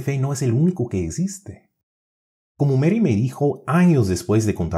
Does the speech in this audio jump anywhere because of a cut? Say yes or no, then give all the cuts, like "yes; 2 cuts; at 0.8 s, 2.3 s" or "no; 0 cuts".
yes; 1 cut; at 2.4 s